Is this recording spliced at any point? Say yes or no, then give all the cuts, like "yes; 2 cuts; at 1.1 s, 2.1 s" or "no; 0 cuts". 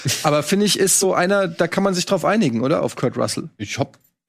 no; 0 cuts